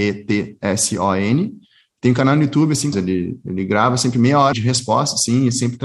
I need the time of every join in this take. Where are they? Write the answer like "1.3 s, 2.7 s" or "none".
2.9 s, 4.5 s

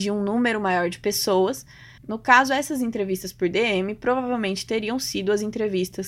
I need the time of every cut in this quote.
2.0 s

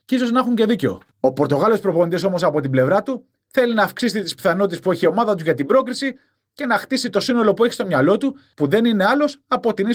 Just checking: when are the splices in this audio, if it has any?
8.5 s

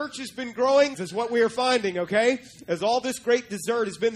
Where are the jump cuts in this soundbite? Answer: 0.9 s

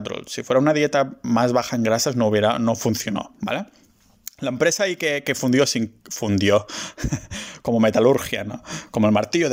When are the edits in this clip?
none

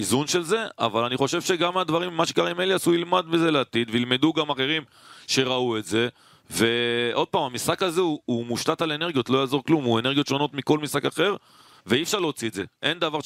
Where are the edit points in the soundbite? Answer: none

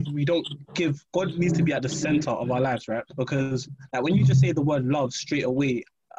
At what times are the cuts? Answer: 1.1 s, 3.1 s

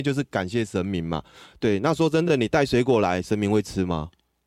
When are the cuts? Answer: none

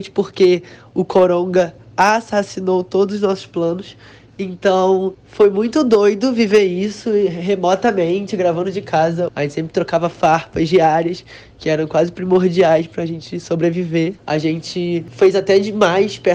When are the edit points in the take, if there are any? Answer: 9.3 s, 14.2 s

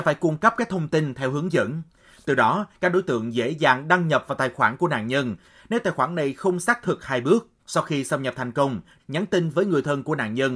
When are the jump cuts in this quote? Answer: 7.6 s, 9.0 s

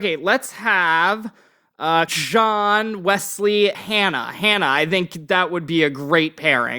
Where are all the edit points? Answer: 2.1 s, 3.7 s

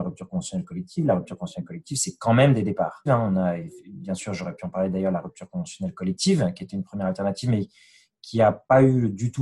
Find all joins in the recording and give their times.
3.1 s

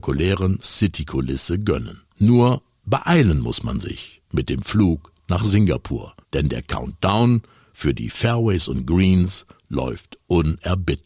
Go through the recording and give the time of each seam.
2.1 s, 6.2 s

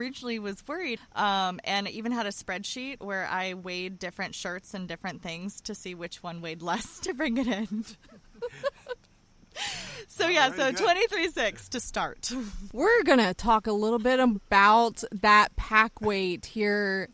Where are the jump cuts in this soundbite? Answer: 1.0 s

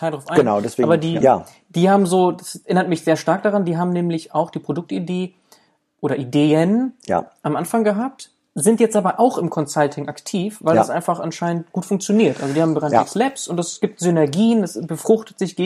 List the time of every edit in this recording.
1.2 s

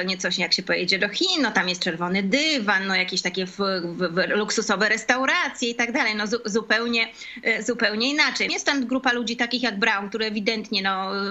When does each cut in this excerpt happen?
8.5 s

